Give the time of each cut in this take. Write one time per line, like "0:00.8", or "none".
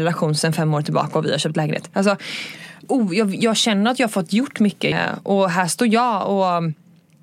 0:02.9
0:04.9